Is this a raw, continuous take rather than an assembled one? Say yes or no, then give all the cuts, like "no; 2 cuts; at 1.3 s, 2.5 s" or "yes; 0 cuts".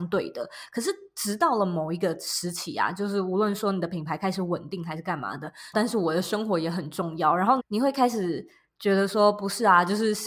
no; 2 cuts; at 5.7 s, 7.6 s